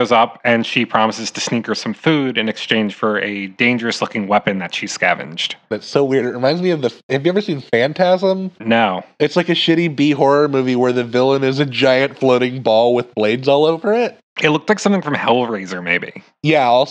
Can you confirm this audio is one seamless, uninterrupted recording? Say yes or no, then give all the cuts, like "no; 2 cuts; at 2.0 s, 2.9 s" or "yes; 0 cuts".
no; 1 cut; at 5.7 s